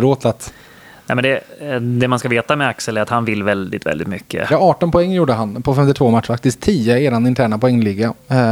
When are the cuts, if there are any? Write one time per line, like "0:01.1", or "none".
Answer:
0:04.5

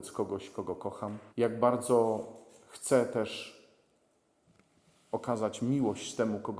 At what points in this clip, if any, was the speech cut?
0:01.3

